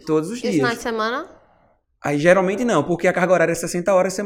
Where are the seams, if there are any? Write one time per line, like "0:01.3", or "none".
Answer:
none